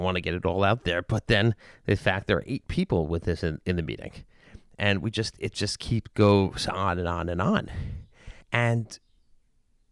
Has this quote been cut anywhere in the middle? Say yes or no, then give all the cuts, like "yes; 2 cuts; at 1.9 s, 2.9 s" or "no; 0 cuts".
yes; 1 cut; at 8.4 s